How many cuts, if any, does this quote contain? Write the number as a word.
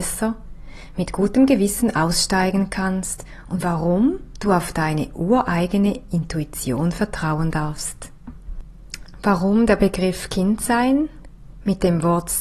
zero